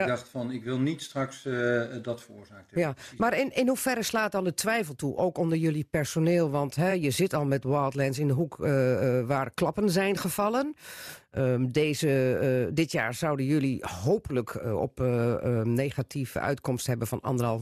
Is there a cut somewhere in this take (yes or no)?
no